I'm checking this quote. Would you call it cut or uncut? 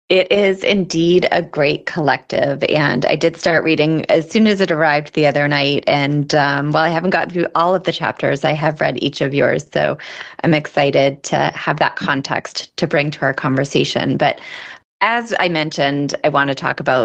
uncut